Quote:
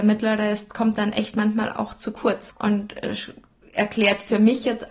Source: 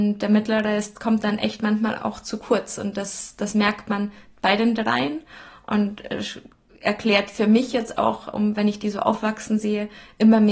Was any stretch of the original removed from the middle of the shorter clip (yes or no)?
yes